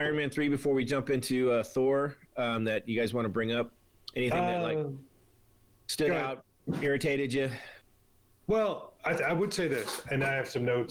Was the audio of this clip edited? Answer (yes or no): no